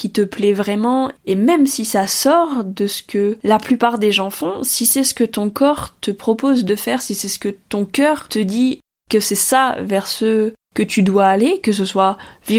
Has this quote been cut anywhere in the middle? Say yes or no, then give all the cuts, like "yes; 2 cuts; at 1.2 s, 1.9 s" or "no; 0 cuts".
no; 0 cuts